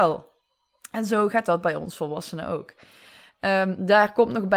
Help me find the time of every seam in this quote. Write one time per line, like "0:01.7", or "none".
none